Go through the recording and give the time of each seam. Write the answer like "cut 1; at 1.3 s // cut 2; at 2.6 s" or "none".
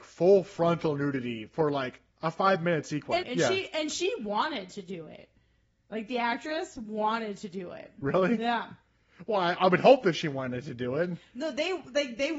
cut 1; at 3.2 s